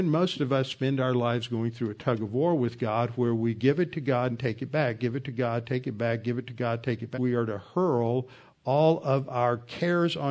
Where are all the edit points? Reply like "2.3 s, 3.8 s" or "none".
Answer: 7.1 s